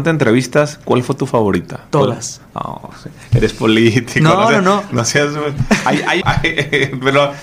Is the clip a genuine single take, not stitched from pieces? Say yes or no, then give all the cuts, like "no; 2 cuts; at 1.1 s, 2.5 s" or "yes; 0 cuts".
no; 1 cut; at 6.2 s